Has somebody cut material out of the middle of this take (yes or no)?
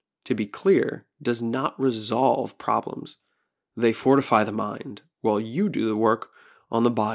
no